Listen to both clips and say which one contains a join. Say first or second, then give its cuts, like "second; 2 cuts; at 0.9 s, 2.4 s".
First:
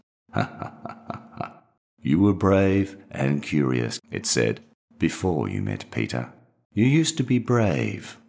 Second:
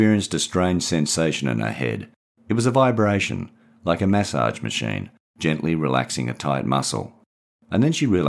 first; 2 cuts; at 4.0 s, 6.7 s